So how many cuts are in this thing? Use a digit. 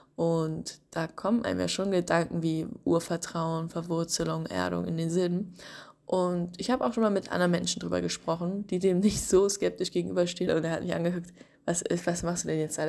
1